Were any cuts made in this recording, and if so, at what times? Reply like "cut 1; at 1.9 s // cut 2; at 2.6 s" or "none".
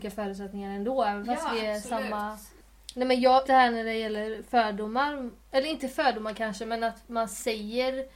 cut 1; at 3.4 s // cut 2; at 5.4 s